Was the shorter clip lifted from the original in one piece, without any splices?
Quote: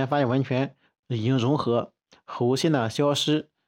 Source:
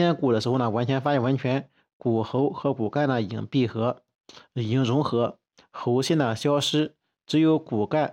no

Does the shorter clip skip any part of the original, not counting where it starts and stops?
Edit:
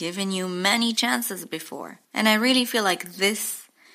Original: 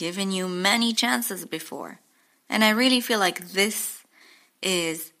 yes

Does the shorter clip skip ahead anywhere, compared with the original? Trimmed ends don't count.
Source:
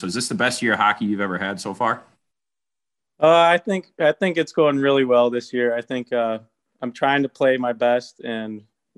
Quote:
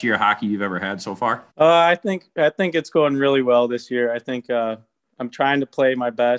yes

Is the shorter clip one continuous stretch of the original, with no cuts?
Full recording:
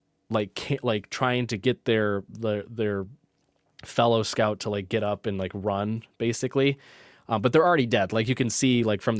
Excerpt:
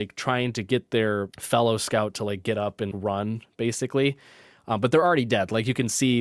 no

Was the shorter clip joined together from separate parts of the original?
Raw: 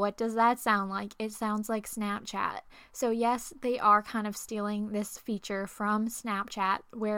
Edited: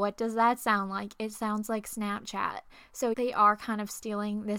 yes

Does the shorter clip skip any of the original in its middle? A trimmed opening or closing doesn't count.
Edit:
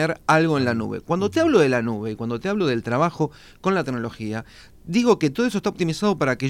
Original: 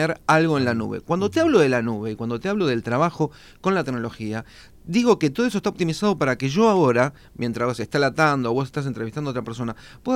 no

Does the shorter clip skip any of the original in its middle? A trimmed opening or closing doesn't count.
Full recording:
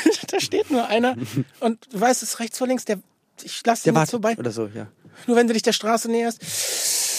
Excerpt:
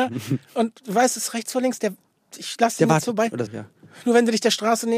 yes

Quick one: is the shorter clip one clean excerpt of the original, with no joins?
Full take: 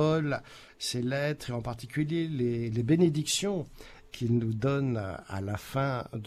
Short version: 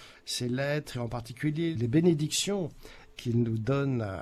no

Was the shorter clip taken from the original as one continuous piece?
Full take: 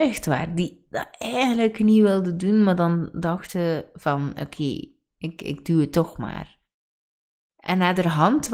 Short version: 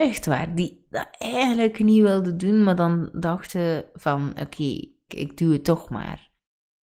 no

